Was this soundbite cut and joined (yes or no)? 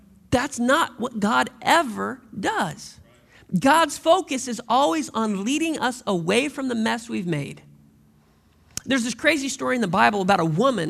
no